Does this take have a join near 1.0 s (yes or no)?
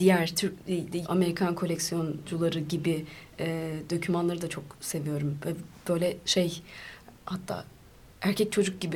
yes